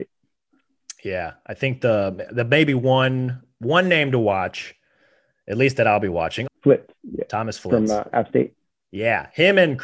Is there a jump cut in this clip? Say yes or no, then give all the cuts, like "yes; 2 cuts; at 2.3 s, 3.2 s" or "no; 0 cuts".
yes; 1 cut; at 6.5 s